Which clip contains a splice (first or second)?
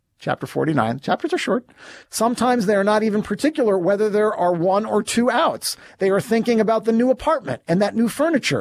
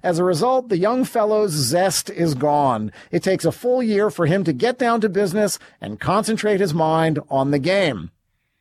first